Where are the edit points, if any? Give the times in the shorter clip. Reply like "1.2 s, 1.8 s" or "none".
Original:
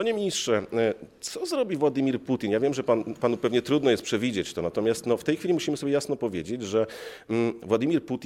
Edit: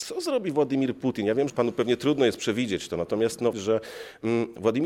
1.5 s, 3.5 s